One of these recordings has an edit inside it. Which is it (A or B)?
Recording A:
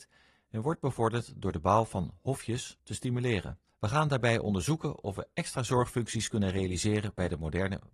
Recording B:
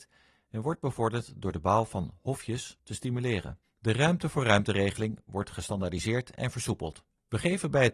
B